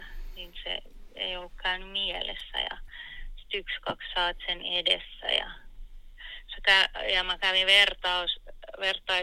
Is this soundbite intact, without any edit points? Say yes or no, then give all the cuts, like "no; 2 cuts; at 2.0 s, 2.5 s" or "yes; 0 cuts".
yes; 0 cuts